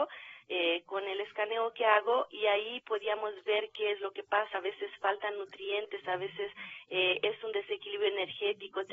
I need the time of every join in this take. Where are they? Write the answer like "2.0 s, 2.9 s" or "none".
none